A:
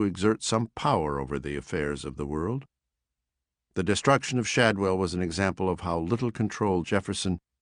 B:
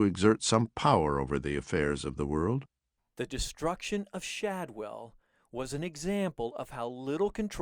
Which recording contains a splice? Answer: B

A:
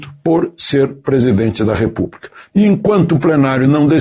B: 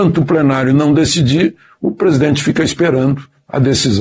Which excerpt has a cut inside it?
A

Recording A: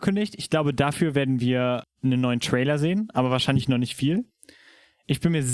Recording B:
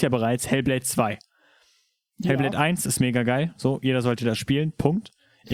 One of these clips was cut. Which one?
A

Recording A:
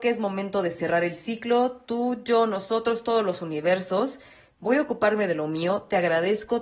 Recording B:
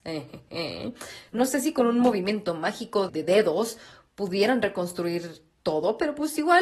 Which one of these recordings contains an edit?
B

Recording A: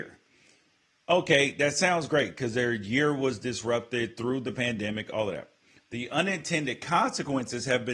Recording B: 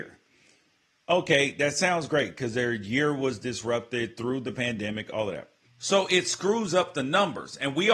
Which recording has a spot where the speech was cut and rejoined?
B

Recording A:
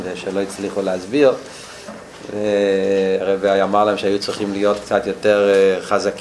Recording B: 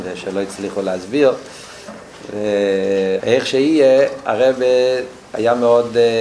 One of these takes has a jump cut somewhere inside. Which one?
B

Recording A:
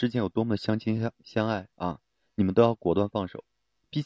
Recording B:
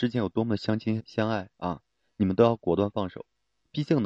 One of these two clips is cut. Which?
B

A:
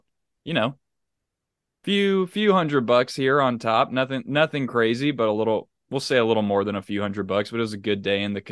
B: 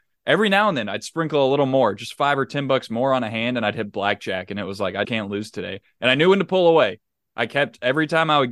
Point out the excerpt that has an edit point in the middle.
B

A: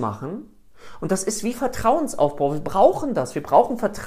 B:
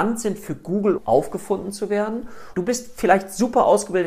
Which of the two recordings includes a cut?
B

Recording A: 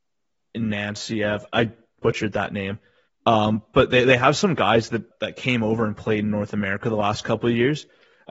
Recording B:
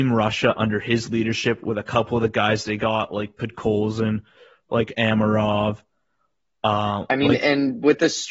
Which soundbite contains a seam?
A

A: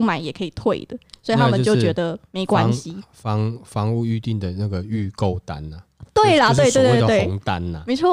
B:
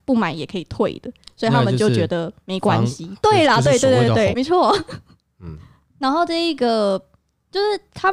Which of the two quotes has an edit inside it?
B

